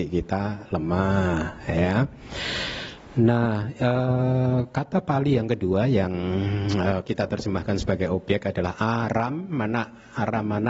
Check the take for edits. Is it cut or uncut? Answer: uncut